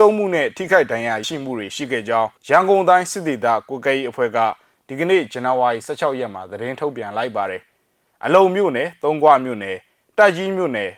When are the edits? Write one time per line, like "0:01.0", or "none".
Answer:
0:01.2
0:02.4